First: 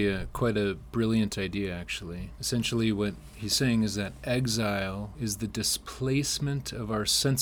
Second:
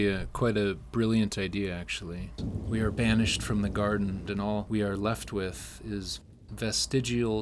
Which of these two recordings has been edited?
second; 2 cuts; at 2.4 s, 4.3 s

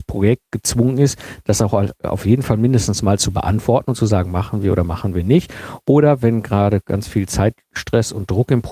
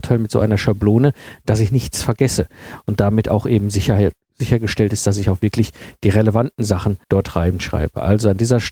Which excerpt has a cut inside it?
second; 1 cut; at 7.0 s

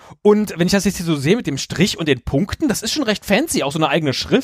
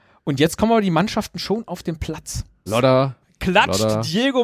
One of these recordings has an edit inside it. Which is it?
second; 1 cut; at 2.7 s

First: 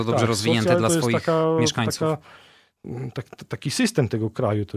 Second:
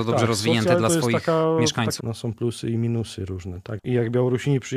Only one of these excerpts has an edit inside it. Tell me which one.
second; 2 cuts; at 2.0 s, 3.8 s

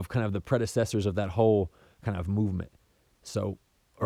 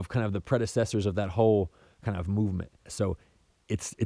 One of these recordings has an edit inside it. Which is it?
second; 1 cut; at 2.9 s

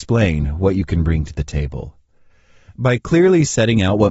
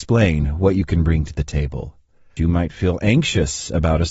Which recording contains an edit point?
second; 1 cut; at 2.4 s

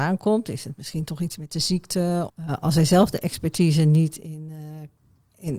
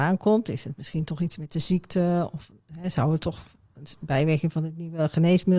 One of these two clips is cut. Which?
first; 1 cut; at 2.3 s

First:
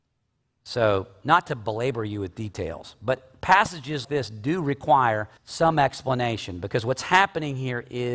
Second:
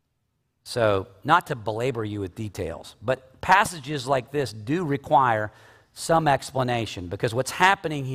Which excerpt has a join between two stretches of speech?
first; 2 cuts; at 4.0 s, 5.4 s

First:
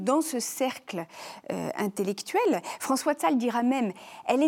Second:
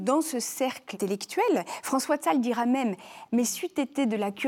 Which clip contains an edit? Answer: second; 2 cuts; at 0.9 s, 3.2 s

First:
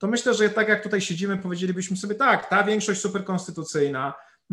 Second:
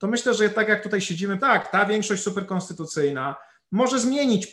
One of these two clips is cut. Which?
second; 1 cut; at 1.4 s

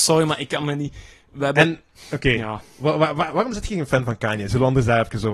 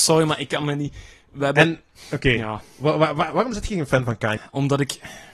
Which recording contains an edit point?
second; 1 cut; at 4.4 s

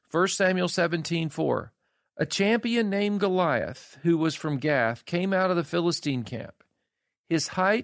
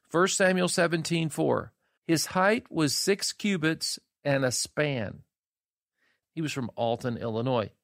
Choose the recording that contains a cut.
second; 2 cuts; at 2.0 s, 6.2 s

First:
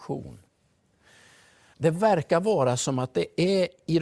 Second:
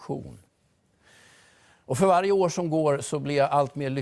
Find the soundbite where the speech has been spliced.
first; 1 cut; at 1.7 s

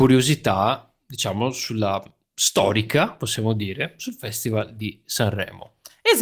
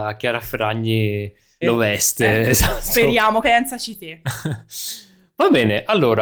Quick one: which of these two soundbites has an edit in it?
second; 2 cuts; at 1.6 s, 3.4 s

